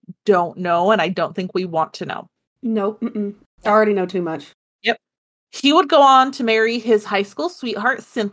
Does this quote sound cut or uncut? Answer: uncut